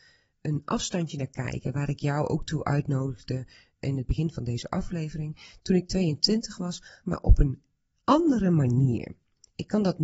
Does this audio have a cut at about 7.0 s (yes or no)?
yes